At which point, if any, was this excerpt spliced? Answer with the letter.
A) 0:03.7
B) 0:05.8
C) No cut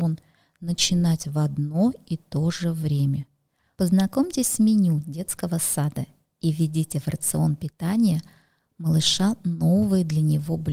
A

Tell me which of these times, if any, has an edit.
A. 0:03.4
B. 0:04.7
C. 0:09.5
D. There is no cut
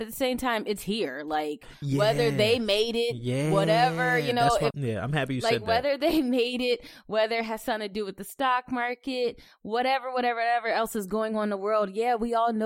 B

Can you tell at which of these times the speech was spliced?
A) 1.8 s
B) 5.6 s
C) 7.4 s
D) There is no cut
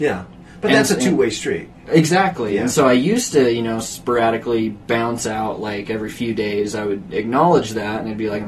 D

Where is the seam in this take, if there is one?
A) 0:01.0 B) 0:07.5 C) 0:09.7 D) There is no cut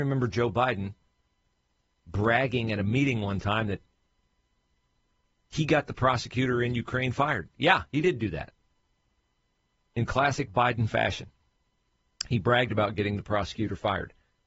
D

